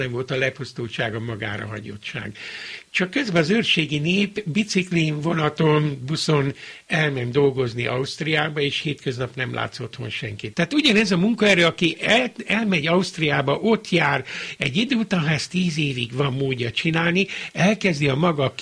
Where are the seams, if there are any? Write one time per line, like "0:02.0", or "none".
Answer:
0:10.5
0:14.6